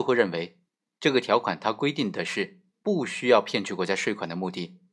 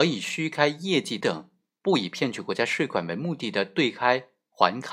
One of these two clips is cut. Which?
second; 1 cut; at 1.2 s

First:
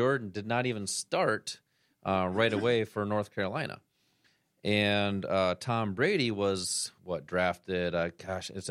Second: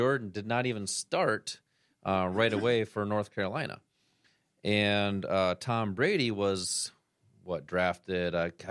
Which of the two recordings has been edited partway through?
first; 1 cut; at 7.0 s

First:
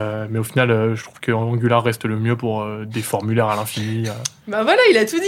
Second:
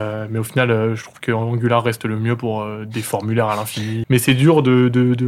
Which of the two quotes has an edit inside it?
second; 1 cut; at 4.0 s

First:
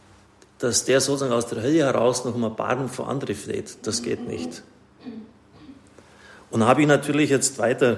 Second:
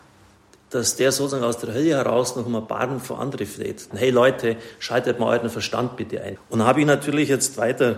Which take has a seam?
second; 2 cuts; at 3.9 s, 6.4 s

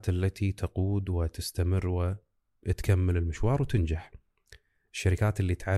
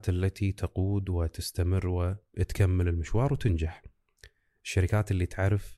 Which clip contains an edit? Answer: second; 1 cut; at 2.3 s

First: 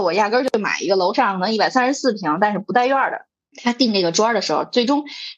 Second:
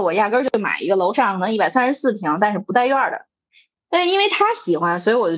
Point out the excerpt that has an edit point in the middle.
first; 1 cut; at 3.4 s

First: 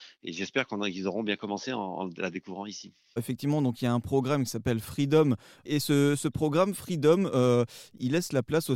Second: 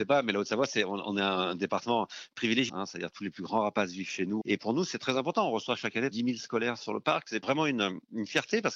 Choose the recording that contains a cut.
second; 3 cuts; at 2.7 s, 4.4 s, 6.1 s

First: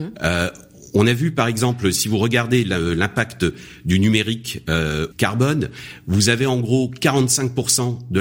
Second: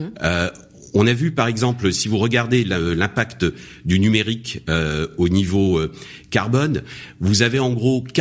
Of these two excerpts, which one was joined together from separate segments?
first; 1 cut; at 5.1 s

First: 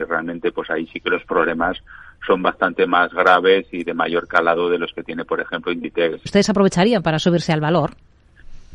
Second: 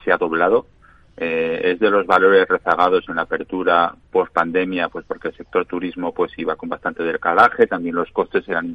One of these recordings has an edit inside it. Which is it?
first; 1 cut; at 6.3 s

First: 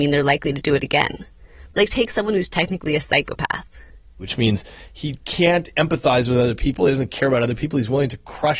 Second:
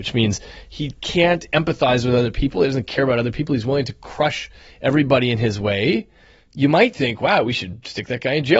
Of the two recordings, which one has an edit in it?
first; 1 cut; at 1.7 s

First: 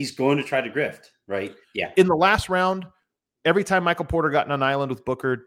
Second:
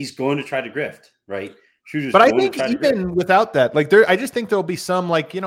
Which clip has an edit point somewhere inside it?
first; 1 cut; at 1.6 s

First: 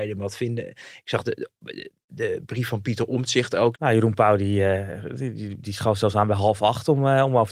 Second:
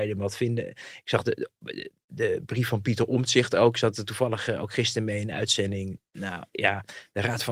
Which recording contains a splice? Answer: first; 1 cut; at 3.7 s

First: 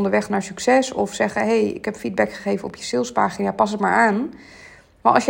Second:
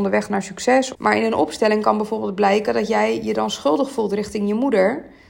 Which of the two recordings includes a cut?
second; 1 cut; at 0.9 s

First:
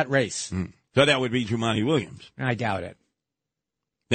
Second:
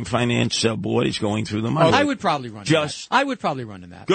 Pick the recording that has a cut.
second; 1 cut; at 1.9 s

